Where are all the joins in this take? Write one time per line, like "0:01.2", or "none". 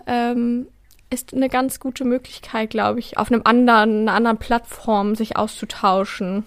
0:03.2